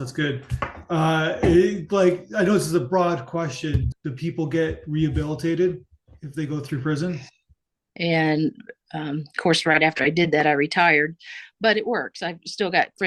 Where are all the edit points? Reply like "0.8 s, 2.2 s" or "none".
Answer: 3.9 s, 7.9 s